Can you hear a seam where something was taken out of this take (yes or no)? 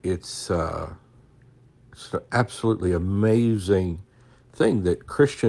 no